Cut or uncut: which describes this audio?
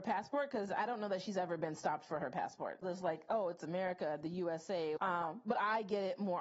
cut